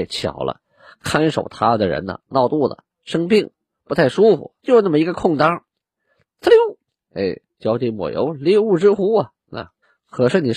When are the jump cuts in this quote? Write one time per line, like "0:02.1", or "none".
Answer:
0:04.6